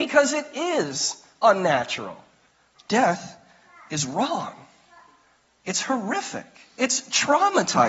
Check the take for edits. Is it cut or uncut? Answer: cut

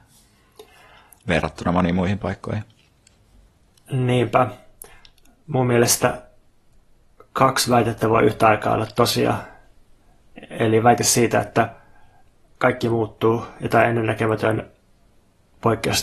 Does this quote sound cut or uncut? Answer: uncut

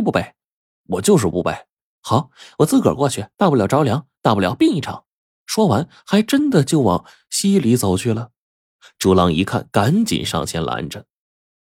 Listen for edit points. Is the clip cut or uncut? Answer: cut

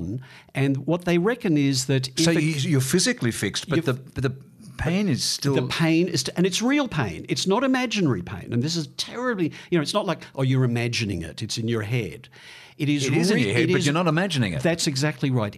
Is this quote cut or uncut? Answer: uncut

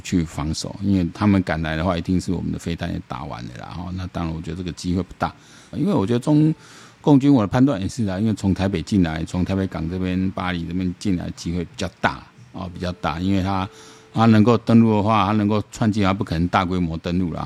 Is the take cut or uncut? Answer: cut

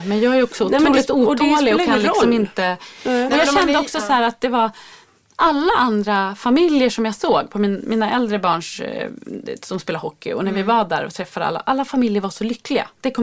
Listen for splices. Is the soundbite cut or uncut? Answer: uncut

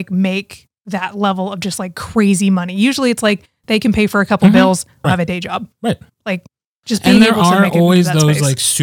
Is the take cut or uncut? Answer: cut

